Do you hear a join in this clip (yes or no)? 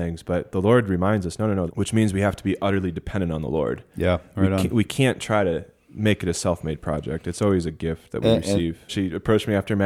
yes